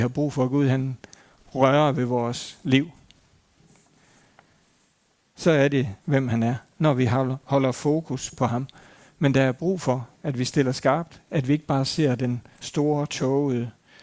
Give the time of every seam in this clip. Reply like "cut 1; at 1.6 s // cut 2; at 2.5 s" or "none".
cut 1; at 6.0 s

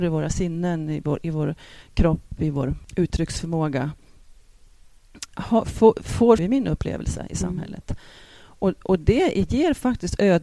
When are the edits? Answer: cut 1; at 6.4 s

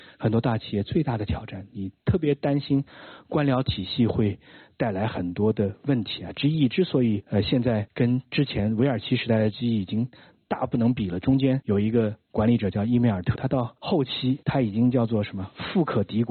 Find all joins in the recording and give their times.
cut 1; at 13.3 s

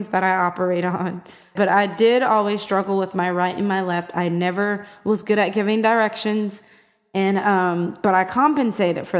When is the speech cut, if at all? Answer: cut 1; at 1.6 s

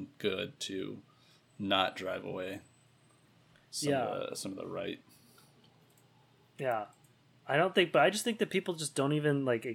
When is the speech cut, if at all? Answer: none

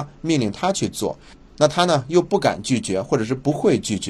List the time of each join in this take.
none

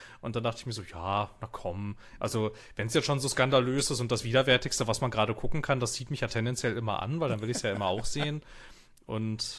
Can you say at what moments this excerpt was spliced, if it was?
none

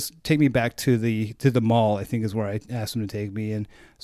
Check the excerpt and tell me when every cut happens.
none

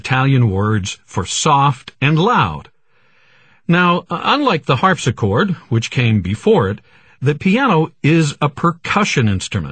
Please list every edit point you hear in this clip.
none

